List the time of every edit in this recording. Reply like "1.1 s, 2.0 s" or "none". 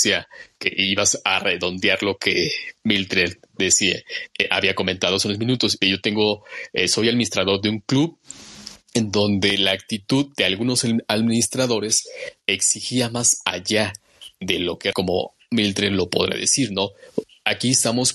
5.8 s, 14.9 s